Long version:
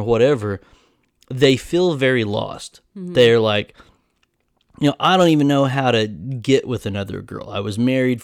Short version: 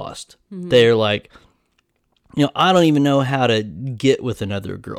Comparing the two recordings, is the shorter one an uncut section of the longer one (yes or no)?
yes